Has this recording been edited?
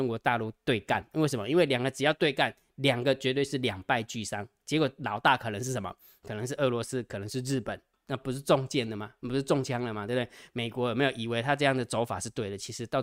yes; 1 cut; at 7.9 s

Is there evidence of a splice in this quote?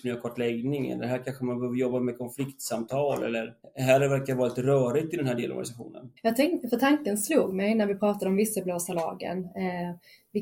yes; 1 cut; at 6.2 s

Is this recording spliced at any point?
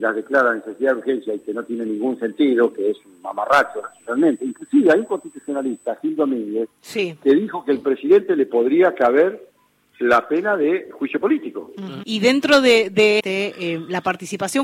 yes; 2 cuts; at 12.0 s, 13.2 s

